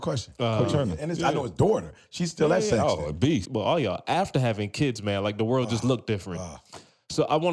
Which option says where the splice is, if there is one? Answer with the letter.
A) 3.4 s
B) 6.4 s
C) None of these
A